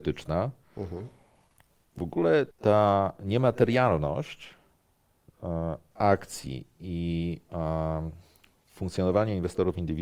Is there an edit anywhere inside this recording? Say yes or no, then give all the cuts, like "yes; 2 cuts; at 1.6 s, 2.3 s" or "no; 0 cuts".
yes; 1 cut; at 2.5 s